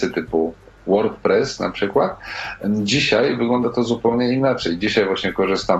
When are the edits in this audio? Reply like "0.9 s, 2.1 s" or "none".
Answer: none